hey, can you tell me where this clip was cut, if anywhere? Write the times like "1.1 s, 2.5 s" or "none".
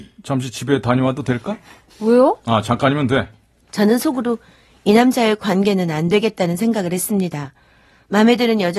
1.9 s, 3.7 s